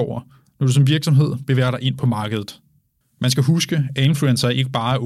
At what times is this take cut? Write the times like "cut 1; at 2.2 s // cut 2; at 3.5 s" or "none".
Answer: cut 1; at 3.0 s